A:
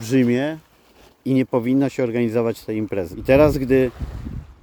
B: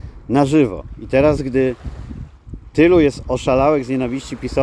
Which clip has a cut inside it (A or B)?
A